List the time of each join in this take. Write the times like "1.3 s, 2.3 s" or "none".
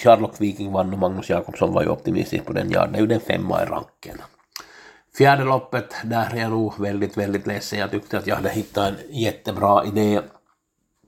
none